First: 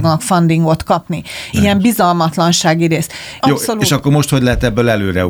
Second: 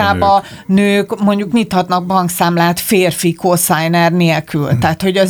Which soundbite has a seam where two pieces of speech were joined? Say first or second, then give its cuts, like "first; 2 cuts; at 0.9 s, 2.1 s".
first; 2 cuts; at 1.5 s, 3.4 s